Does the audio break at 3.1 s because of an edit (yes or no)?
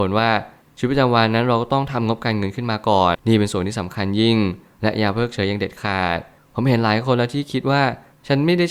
yes